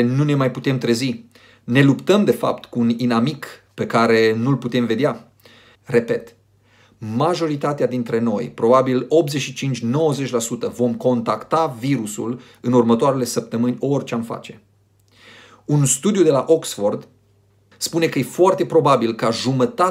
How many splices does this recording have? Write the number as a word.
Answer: one